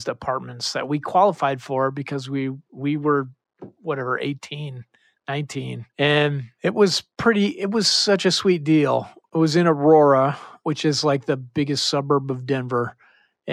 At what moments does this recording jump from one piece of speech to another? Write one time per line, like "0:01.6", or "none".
0:05.9
0:10.6